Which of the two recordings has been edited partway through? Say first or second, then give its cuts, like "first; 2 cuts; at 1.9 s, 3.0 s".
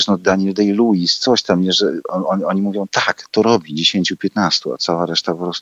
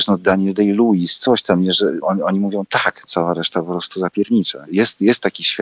second; 3 cuts; at 2.0 s, 3.0 s, 4.7 s